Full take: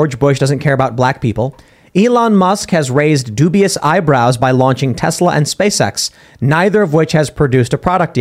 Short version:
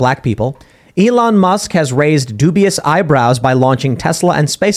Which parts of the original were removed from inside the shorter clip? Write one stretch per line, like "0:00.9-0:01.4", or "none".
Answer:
none